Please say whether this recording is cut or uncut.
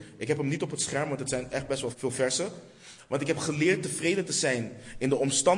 cut